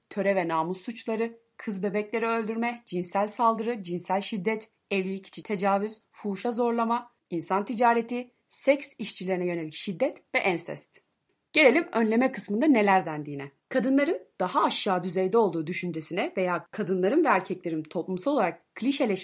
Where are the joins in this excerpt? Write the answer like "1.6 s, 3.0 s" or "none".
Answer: 13.6 s